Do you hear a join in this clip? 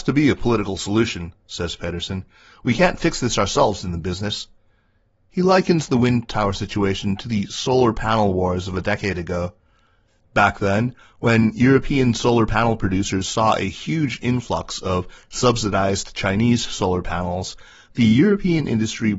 no; 0 cuts

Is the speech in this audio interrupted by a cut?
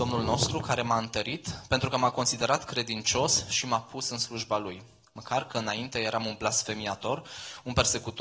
no; 0 cuts

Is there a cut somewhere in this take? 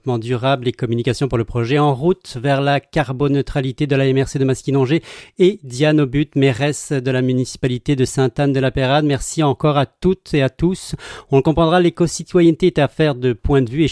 no; 0 cuts

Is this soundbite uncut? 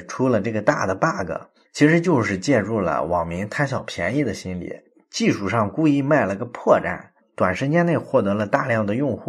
yes; 0 cuts

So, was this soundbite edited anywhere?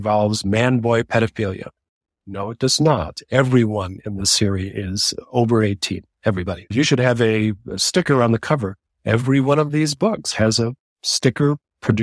no; 0 cuts

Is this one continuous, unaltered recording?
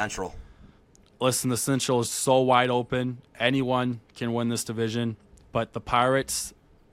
yes; 0 cuts

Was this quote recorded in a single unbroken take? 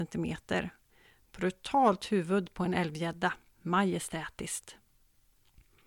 yes; 0 cuts

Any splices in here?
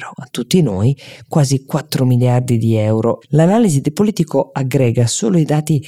yes; 1 cut; at 3.2 s

